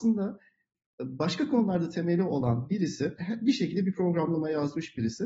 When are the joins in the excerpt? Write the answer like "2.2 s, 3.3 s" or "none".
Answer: 3.2 s